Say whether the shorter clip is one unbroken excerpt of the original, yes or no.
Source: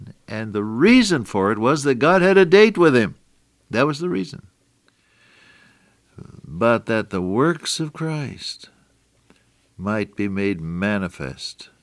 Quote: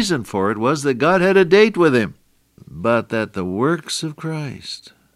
no